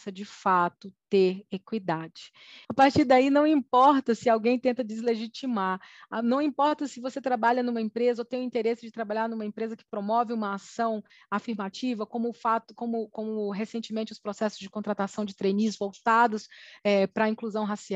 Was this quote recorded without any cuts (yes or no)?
no